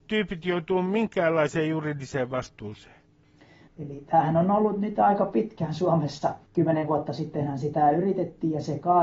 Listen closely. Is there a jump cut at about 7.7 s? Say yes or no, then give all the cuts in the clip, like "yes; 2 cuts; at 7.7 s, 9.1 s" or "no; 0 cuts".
no; 2 cuts; at 3.7 s, 6.5 s